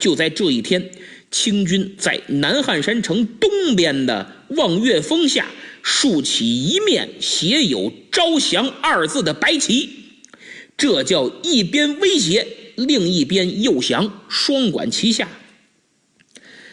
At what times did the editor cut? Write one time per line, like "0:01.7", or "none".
none